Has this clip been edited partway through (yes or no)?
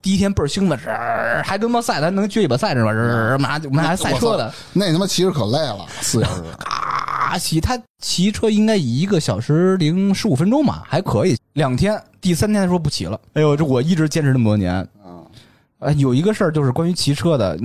yes